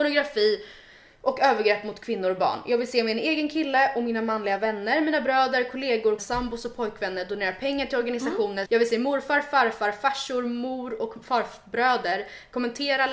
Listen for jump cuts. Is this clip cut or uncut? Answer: cut